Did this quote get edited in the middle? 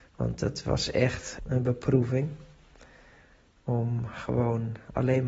yes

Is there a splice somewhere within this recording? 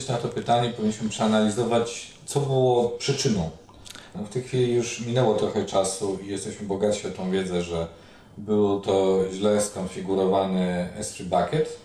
yes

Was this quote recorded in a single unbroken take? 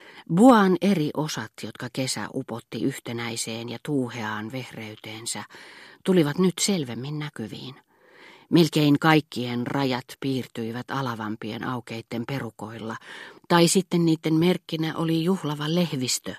yes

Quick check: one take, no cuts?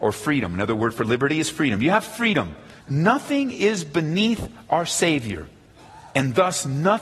no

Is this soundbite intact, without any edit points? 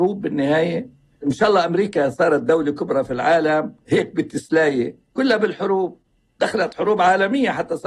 yes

